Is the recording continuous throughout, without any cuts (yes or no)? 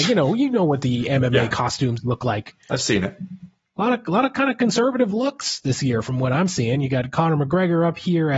yes